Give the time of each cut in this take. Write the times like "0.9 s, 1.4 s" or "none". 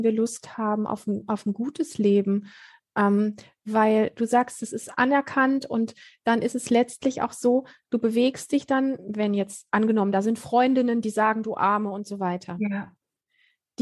none